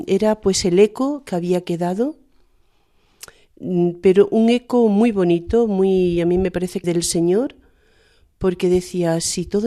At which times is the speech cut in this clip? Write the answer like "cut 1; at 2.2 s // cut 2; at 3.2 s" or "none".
cut 1; at 6.8 s